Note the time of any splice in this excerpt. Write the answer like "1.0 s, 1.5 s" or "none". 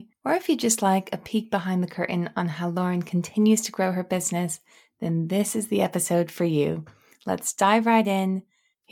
none